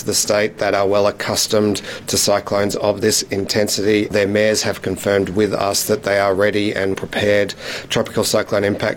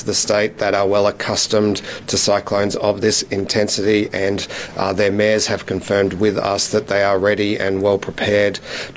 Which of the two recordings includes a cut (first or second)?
first